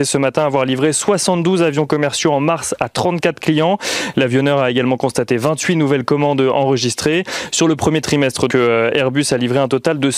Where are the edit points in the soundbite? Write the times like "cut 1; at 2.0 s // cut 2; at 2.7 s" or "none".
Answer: cut 1; at 8.5 s